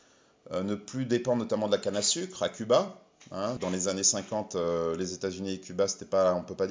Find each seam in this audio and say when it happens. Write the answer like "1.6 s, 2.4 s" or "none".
3.6 s